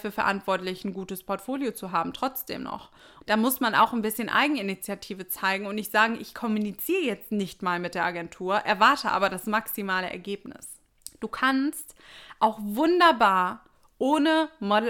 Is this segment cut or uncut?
cut